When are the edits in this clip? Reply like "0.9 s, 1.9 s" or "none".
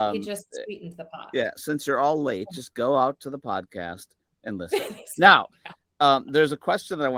none